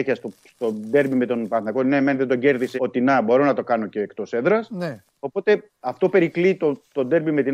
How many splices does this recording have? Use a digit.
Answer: 1